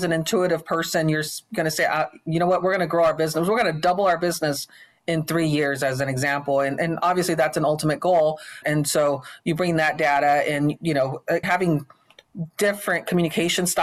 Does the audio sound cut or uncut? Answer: cut